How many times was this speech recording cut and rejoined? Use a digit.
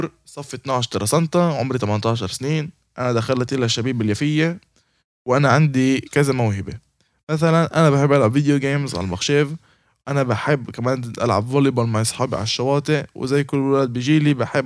0